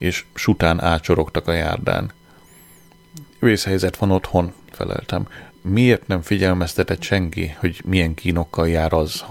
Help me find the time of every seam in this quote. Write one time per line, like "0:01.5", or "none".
0:03.3
0:05.5

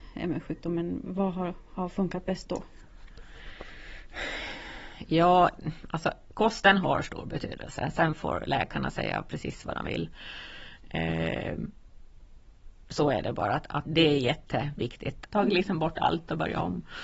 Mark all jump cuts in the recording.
0:13.8
0:15.3

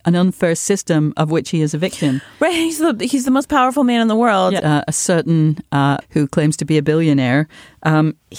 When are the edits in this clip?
0:04.6
0:06.0

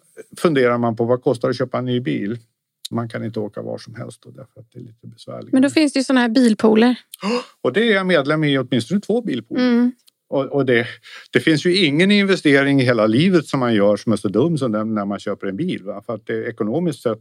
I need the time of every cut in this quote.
0:02.9
0:10.0

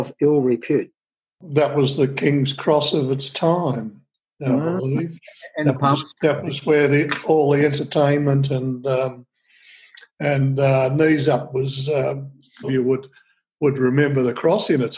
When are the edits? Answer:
0:10.1
0:12.6

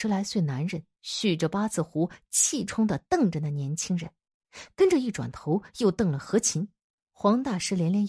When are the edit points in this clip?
0:02.7
0:07.0

